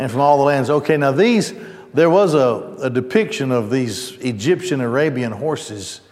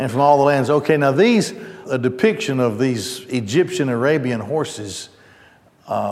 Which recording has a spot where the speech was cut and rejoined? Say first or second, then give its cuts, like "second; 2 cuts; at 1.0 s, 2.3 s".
second; 1 cut; at 1.8 s